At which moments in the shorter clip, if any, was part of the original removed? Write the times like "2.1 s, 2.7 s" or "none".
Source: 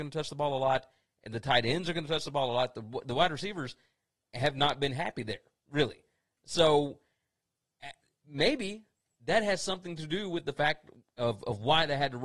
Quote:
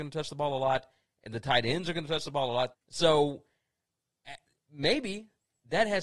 2.7 s